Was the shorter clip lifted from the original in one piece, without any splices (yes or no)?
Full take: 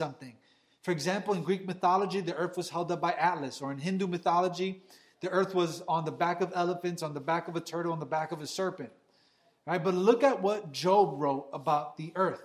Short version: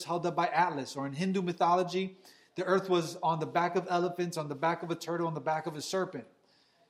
yes